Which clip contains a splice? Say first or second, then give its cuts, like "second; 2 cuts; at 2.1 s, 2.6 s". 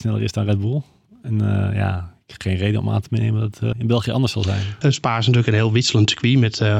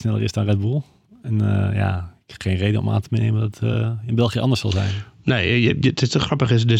first; 2 cuts; at 3.7 s, 4.8 s